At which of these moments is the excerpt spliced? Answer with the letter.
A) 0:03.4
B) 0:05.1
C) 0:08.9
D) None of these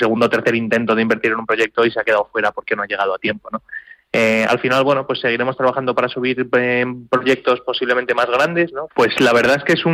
C